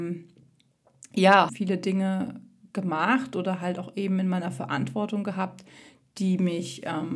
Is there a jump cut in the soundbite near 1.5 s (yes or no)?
yes